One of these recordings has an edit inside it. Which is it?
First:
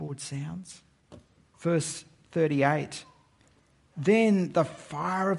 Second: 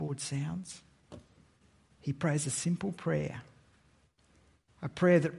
first; 1 cut; at 1.5 s

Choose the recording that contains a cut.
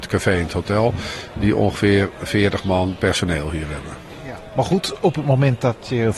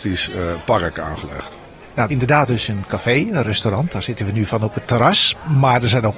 second; 2 cuts; at 2.1 s, 4.9 s

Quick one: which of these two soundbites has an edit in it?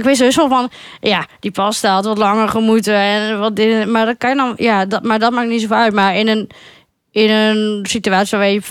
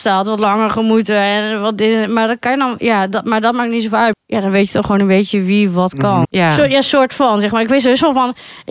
second; 2 cuts; at 4.1 s, 6.2 s

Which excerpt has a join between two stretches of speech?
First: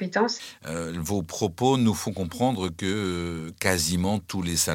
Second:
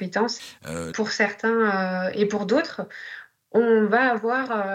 second; 1 cut; at 0.9 s

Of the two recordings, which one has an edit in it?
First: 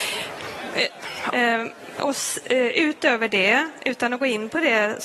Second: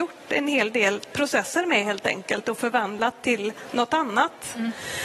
first; 1 cut; at 1.3 s

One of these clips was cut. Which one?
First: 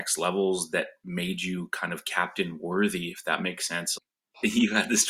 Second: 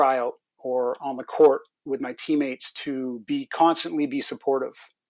first; 1 cut; at 4.0 s

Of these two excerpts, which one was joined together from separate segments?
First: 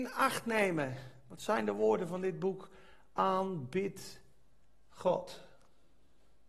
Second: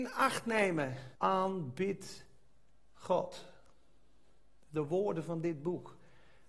second; 1 cut; at 1.2 s

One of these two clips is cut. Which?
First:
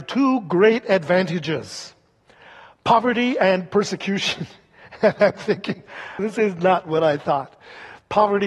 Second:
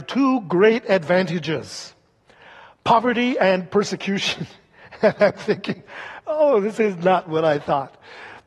first; 1 cut; at 6.2 s

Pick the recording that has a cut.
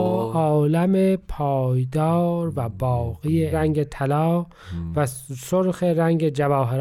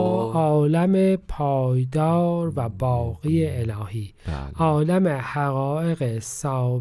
first; 1 cut; at 3.5 s

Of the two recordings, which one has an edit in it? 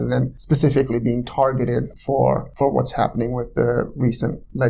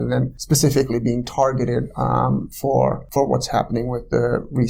first; 1 cut; at 1.9 s

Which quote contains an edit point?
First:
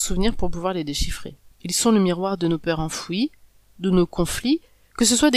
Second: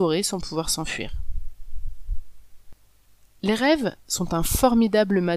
first; 1 cut; at 1.5 s

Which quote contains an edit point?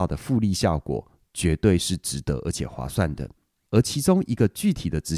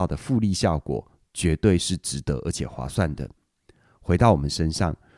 first; 1 cut; at 3.7 s

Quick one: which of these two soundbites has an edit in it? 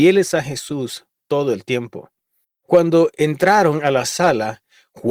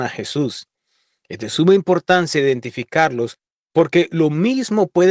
first; 1 cut; at 2.4 s

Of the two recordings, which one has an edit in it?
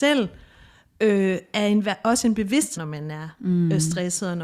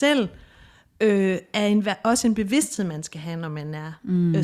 first; 1 cut; at 2.8 s

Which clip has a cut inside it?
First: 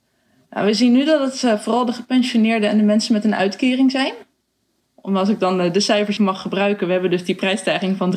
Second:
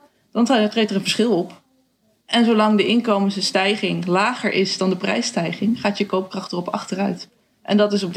first; 1 cut; at 6.2 s

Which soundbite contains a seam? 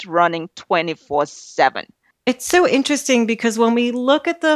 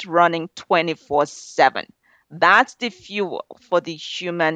first; 1 cut; at 2.1 s

